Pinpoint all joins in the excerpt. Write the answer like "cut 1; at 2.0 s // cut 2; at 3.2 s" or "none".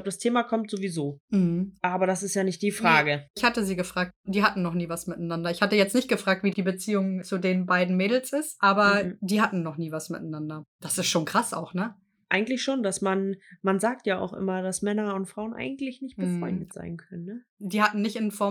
none